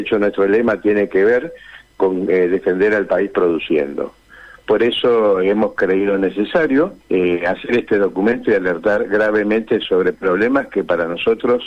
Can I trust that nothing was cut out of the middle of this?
no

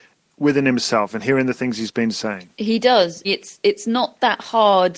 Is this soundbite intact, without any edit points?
no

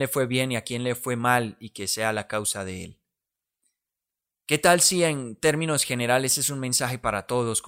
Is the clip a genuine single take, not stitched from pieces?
yes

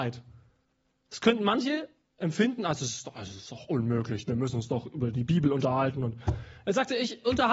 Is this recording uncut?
yes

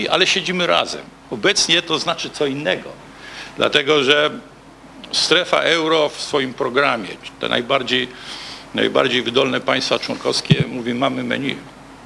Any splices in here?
no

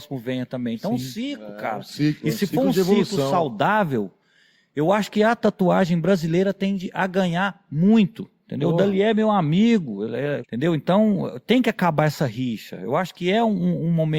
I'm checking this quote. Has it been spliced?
yes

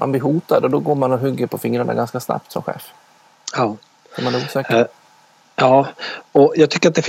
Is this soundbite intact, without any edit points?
yes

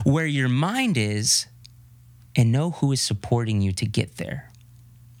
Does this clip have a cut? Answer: no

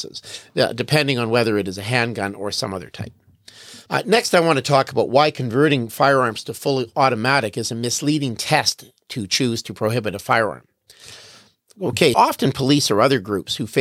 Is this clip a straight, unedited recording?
no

